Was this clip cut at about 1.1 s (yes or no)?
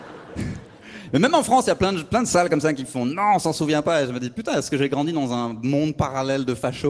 no